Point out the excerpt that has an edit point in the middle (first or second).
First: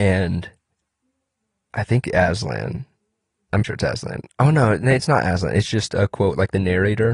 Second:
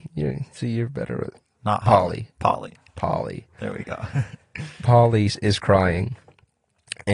first